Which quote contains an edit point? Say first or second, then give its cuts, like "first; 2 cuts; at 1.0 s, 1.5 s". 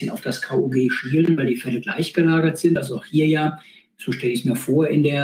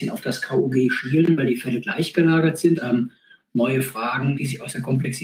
second; 2 cuts; at 2.8 s, 4.3 s